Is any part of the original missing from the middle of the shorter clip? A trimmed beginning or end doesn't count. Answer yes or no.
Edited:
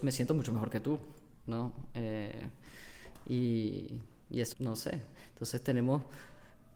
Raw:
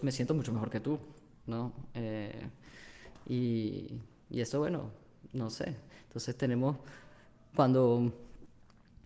yes